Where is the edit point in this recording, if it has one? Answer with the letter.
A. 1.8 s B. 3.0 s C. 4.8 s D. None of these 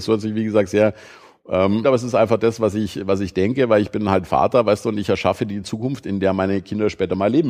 A